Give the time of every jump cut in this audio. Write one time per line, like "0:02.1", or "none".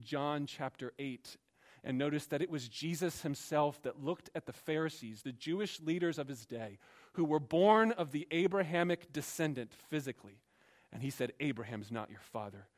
none